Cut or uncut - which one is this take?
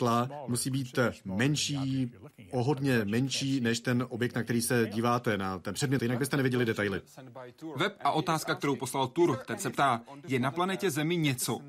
cut